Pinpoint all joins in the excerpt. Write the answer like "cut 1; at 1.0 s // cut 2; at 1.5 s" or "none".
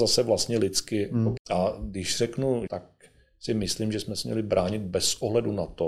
cut 1; at 1.4 s // cut 2; at 2.7 s